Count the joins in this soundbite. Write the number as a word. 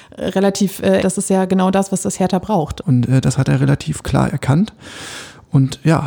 two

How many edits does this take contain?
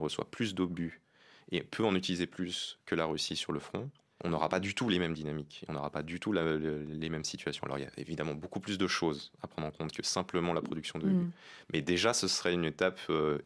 zero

